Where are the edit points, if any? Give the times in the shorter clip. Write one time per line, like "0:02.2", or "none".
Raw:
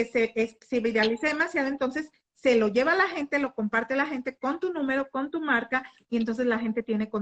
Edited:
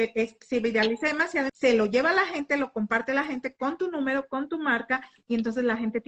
0:01.5